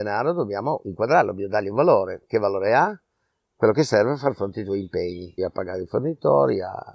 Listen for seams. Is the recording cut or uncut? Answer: cut